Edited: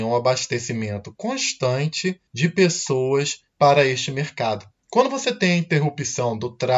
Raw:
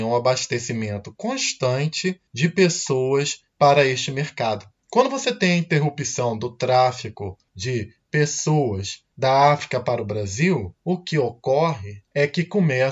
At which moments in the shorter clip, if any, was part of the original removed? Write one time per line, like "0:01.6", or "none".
none